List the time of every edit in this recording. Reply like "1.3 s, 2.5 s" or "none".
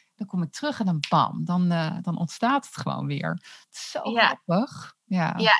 none